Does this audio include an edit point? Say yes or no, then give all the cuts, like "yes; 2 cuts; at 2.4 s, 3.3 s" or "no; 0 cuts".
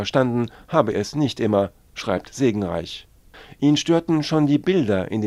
yes; 1 cut; at 0.9 s